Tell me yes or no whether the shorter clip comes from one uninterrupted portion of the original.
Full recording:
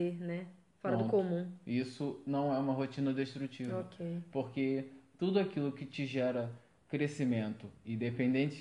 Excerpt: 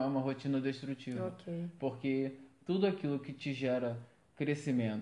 yes